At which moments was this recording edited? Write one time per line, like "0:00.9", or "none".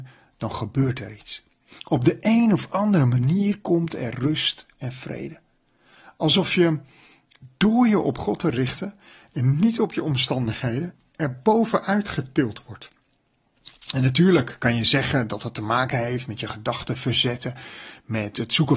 none

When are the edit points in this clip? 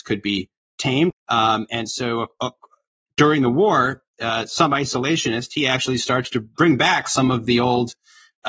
0:01.1

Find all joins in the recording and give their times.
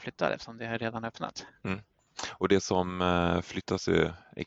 none

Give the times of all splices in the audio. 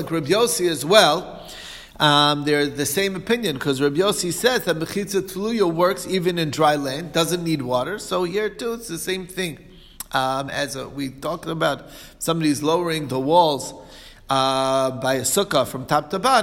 none

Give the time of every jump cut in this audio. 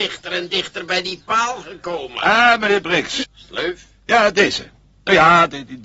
0:03.2

